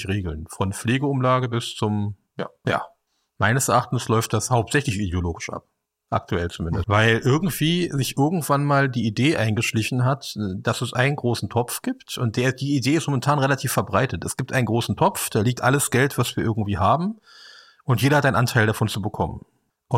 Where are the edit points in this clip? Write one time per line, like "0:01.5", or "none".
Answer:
0:02.6
0:06.8